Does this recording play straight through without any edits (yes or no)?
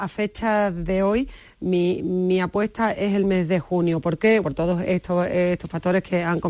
no